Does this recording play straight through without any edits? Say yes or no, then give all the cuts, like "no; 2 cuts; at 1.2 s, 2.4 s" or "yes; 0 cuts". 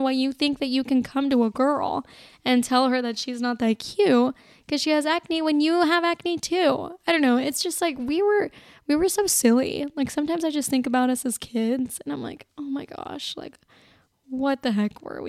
yes; 0 cuts